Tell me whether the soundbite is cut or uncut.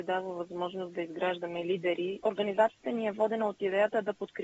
cut